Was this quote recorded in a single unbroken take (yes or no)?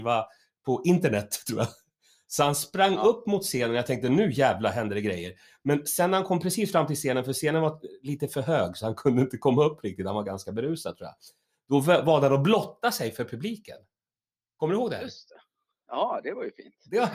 yes